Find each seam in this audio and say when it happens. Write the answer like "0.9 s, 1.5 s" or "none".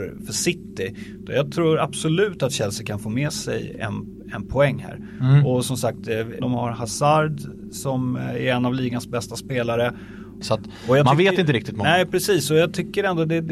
6.4 s, 10.4 s